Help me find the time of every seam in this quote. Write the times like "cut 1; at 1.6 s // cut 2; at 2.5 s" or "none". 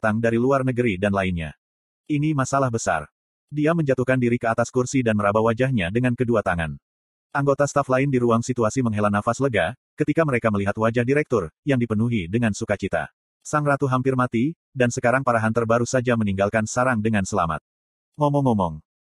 cut 1; at 13.2 s